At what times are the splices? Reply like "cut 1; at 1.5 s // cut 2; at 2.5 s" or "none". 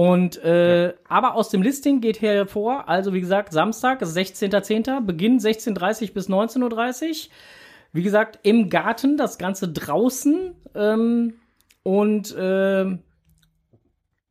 none